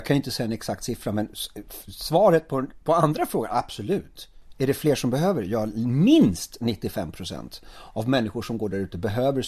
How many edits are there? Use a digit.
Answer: 1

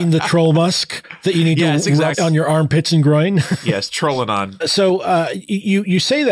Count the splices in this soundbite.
2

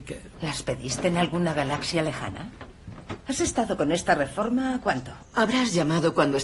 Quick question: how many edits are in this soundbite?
1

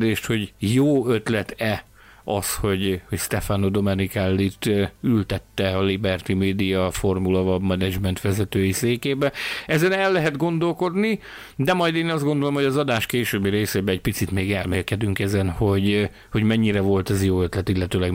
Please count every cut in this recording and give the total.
0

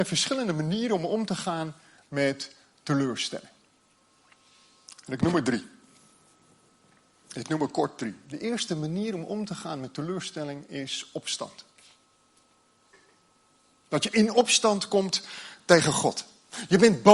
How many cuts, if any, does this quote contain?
0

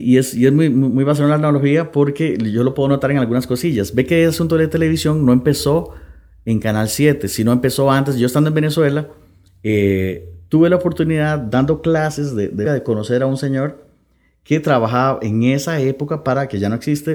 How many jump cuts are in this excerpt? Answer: 1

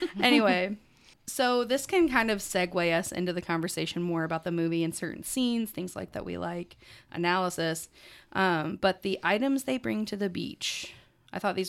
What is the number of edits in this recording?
1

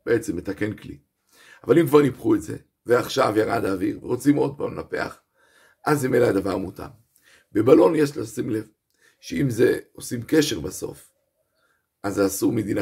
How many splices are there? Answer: 0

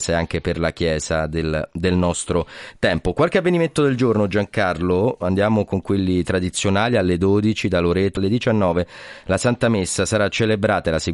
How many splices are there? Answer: 1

